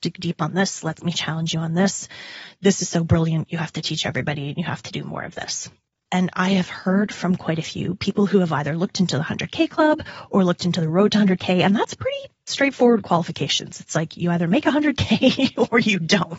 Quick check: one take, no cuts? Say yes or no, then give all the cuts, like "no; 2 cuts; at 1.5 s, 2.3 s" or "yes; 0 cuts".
no; 1 cut; at 6.1 s